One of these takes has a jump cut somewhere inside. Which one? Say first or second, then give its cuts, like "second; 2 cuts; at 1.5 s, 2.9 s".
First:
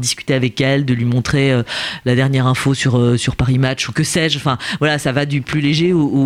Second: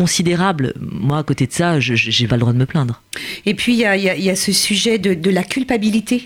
second; 1 cut; at 2.3 s